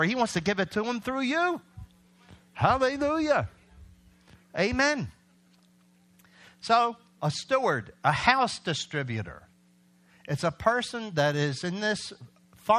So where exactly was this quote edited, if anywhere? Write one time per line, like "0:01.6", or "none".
none